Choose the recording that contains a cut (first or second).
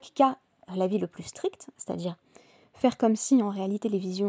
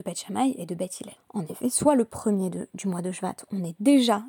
second